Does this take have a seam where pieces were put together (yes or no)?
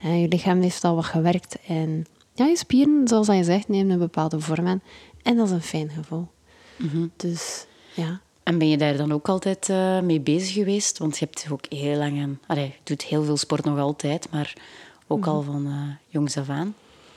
no